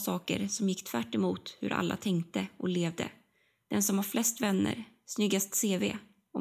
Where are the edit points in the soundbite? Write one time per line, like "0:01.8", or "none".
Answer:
0:03.6